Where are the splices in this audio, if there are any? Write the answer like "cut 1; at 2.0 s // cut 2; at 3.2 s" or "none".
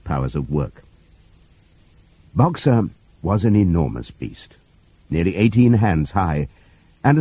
cut 1; at 2.2 s